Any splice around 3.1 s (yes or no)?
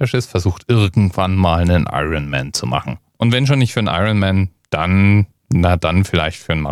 yes